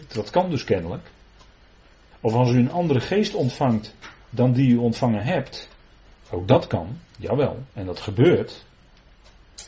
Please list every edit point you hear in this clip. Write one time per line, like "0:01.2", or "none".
0:02.1
0:06.1